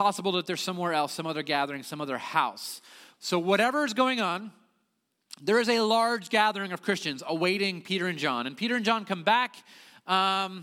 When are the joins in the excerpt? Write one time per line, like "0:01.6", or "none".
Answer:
0:03.1